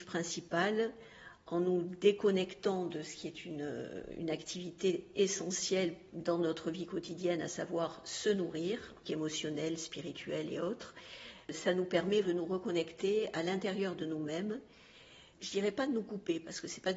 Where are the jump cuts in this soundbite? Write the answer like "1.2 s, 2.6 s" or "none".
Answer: 9.0 s, 12.2 s, 15.3 s

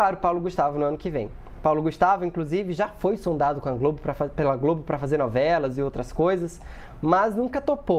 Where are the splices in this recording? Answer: none

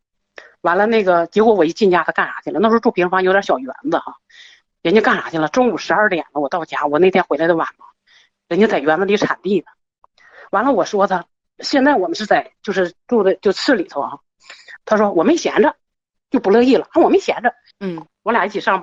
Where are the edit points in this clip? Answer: 14.8 s, 17.7 s

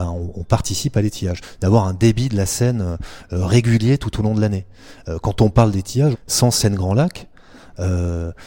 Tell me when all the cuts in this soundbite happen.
1.6 s, 6.1 s

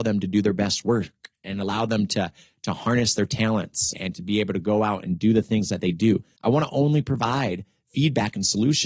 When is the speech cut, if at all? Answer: 3.9 s, 6.4 s

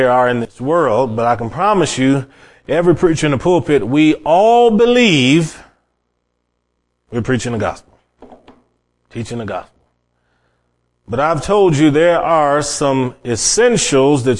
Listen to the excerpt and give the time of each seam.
none

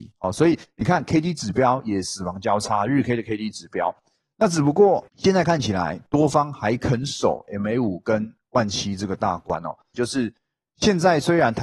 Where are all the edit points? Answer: 5.1 s, 9.9 s

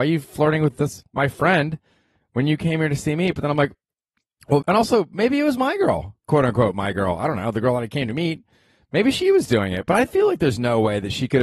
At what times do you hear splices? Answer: 4.6 s

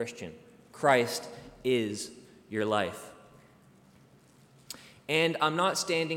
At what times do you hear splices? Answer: none

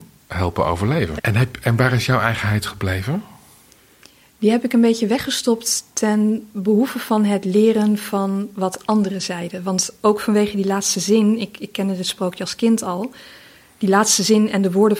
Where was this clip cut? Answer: 1.2 s

